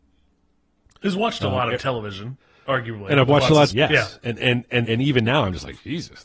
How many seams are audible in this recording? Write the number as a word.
two